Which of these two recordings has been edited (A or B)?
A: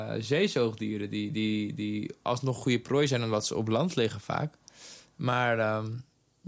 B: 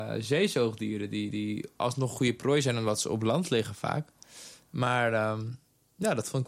B